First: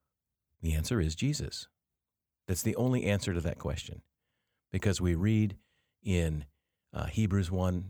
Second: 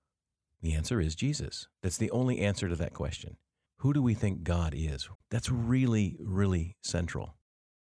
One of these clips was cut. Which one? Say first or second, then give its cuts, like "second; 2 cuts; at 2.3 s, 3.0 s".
second; 3 cuts; at 1.7 s, 3.7 s, 5.1 s